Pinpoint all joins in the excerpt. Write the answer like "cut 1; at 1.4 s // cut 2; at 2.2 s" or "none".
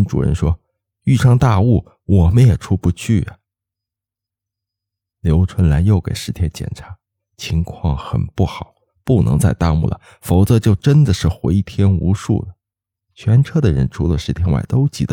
cut 1; at 13.0 s